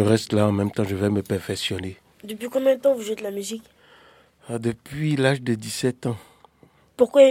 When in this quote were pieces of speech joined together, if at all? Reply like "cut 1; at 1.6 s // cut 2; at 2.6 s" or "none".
none